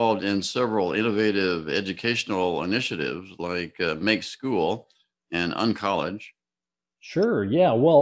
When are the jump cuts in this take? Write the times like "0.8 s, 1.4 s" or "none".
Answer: 6.9 s